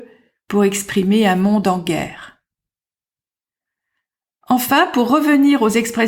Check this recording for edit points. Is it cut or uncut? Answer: uncut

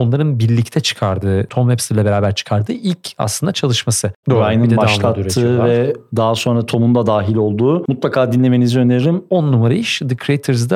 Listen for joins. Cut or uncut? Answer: cut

